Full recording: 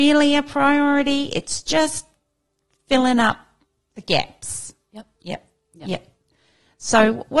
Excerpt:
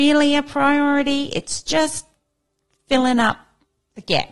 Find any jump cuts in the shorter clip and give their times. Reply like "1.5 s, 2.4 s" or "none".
none